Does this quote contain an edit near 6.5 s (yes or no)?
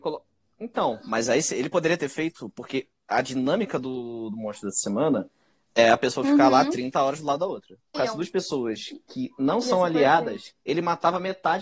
no